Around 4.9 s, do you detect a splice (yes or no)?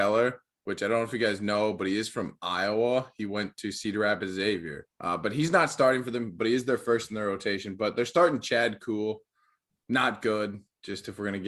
yes